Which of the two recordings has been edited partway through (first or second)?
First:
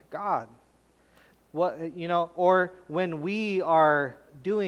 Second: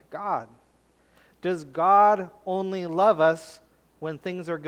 first